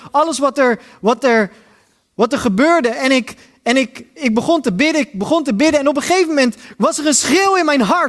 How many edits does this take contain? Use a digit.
0